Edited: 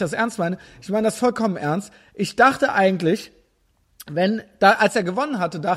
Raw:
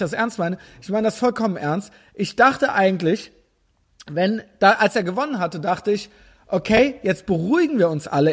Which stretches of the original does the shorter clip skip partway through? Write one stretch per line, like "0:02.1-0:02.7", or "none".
none